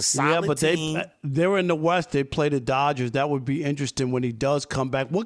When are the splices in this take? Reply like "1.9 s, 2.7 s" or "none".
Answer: none